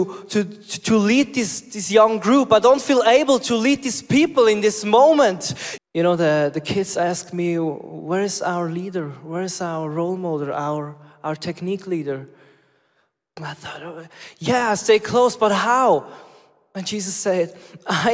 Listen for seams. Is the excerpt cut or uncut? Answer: cut